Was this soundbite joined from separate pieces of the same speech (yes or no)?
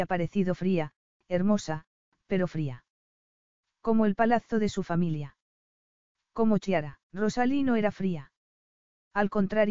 yes